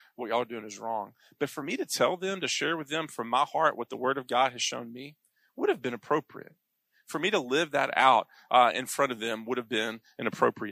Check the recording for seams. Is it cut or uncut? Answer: uncut